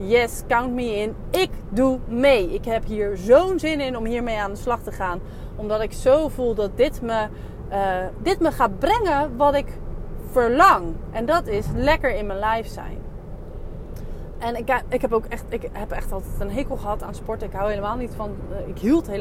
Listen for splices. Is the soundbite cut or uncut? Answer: uncut